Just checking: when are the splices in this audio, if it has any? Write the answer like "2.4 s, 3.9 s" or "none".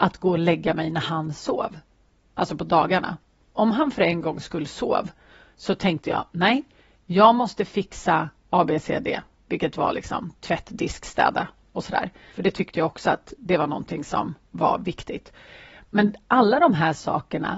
12.3 s